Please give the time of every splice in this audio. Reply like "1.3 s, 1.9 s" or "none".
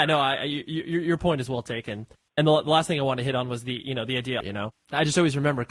4.4 s

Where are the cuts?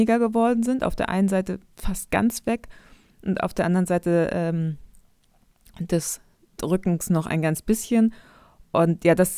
none

